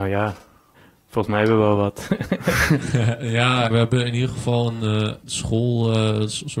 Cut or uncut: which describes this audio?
cut